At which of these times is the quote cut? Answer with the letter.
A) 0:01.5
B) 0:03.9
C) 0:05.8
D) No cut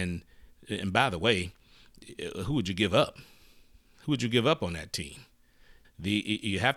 C